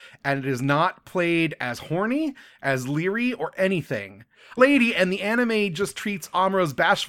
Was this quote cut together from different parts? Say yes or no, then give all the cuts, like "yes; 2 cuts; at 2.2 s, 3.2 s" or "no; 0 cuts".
yes; 1 cut; at 4.6 s